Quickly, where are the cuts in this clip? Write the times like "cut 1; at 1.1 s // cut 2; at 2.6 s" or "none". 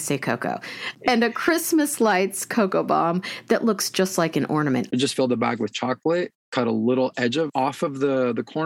cut 1; at 4.9 s